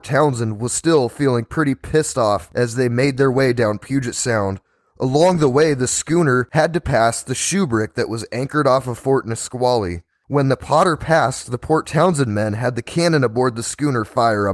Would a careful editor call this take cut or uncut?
uncut